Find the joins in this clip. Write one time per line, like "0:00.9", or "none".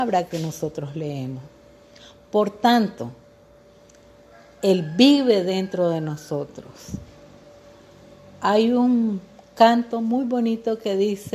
none